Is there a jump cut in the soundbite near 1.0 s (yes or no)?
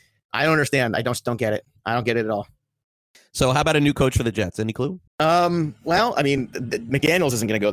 no